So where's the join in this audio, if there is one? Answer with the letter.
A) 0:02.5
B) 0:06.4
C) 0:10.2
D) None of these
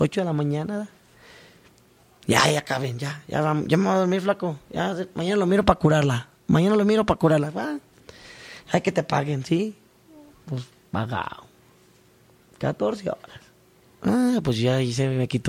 D